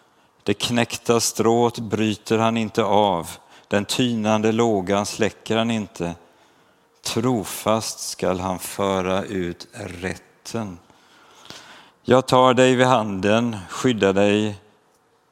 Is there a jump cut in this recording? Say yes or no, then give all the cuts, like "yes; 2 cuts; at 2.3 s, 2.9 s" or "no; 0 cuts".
yes; 1 cut; at 11.9 s